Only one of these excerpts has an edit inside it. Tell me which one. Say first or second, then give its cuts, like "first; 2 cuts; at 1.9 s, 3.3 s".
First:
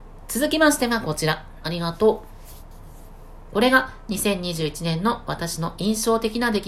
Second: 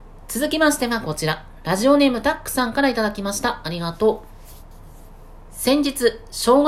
first; 2 cuts; at 1.6 s, 3.5 s